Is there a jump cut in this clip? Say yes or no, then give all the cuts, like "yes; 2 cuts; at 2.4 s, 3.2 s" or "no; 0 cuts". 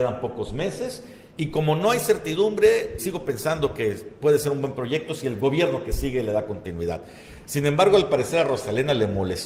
yes; 1 cut; at 3.0 s